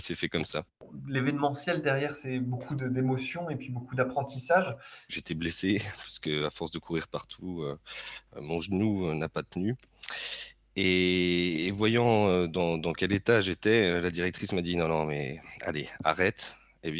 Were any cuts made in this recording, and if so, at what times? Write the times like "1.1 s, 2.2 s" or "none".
5.1 s